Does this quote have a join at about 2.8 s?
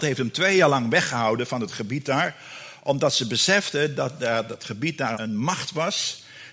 no; 1 cut; at 5.1 s

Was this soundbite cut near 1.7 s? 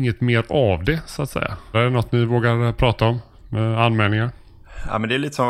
yes; 1 cut; at 1.7 s

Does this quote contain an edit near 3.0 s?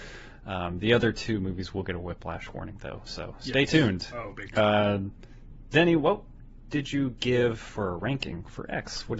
no; 0 cuts

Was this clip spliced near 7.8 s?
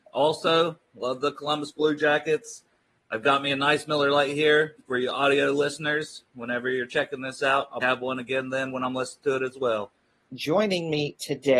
yes; 2 cuts; at 7.8 s, 10.3 s

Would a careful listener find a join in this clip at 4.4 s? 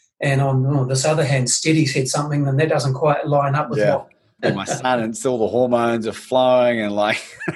yes; 1 cut; at 4.4 s

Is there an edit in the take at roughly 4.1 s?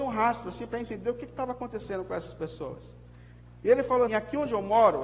yes; 1 cut; at 4.1 s

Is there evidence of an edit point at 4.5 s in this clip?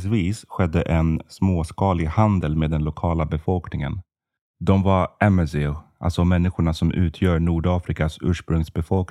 no; 0 cuts

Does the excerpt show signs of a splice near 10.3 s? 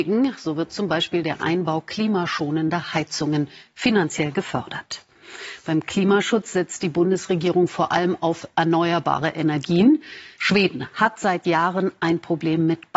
yes; 1 cut; at 10.3 s

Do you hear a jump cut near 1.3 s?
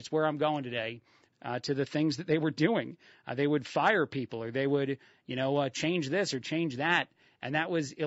yes; 1 cut; at 1.3 s

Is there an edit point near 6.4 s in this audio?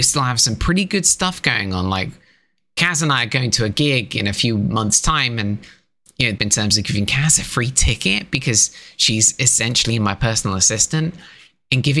yes; 1 cut; at 6.4 s

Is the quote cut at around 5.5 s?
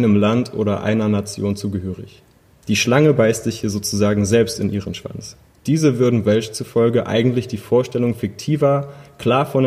yes; 2 cuts; at 2.6 s, 5.5 s

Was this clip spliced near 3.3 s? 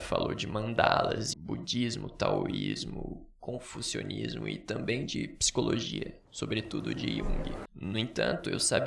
no; 2 cuts; at 1.3 s, 7.7 s

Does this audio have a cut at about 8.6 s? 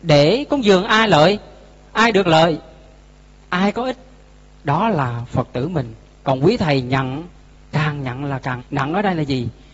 yes; 1 cut; at 8.6 s

